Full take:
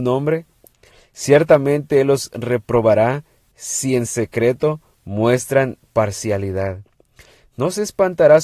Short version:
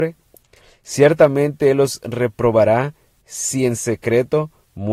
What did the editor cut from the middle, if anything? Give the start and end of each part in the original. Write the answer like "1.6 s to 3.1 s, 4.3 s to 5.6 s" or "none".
none